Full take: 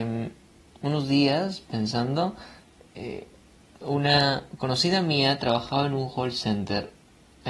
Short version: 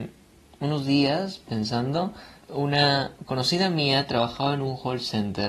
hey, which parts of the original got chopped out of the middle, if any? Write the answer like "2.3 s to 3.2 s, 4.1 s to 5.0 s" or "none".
2.6 s to 3.7 s